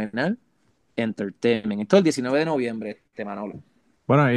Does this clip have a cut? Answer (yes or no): no